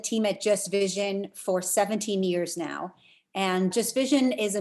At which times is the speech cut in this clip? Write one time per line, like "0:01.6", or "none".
0:03.7